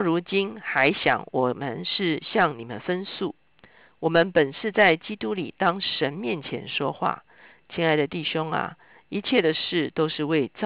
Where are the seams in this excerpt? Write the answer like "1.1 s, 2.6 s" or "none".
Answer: none